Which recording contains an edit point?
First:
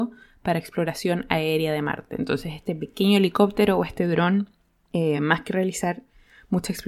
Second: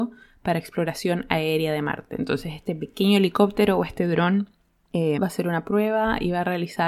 second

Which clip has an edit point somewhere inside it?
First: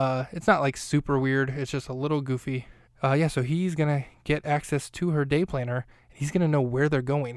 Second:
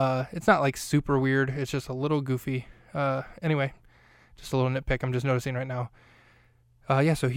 first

